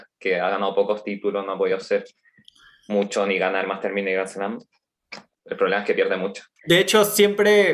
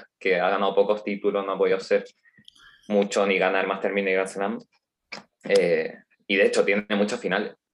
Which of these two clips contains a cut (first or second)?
first